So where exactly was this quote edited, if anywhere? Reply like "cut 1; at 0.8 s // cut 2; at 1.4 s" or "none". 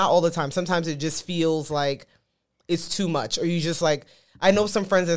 none